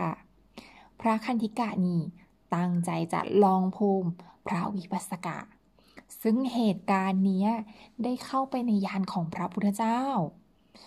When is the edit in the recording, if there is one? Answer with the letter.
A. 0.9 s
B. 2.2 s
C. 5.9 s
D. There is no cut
D